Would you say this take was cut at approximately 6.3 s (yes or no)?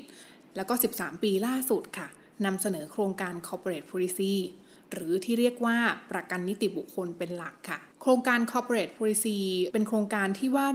no